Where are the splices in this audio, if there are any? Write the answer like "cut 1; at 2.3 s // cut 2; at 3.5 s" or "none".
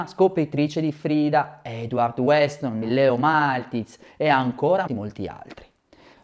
cut 1; at 2.8 s // cut 2; at 4.9 s